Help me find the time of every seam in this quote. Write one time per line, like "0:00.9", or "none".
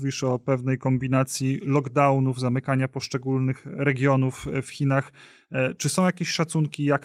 none